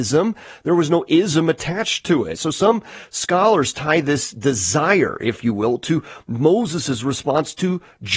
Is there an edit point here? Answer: yes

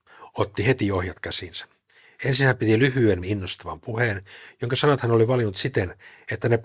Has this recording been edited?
yes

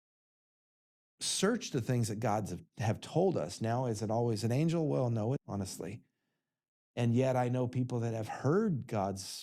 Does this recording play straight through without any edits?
no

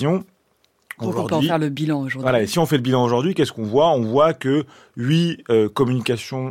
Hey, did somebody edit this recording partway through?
no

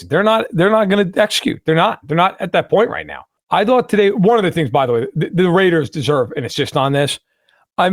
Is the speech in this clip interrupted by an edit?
no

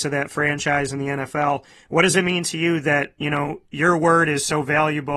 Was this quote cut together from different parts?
no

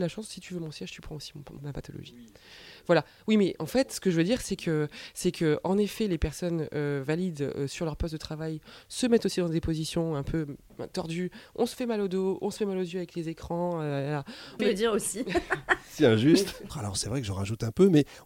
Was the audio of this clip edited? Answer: yes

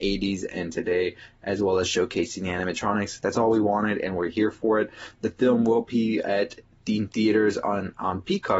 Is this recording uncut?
yes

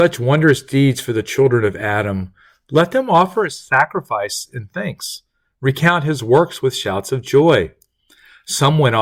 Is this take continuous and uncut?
yes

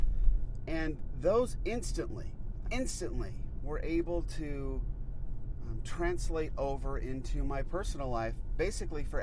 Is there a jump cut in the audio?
yes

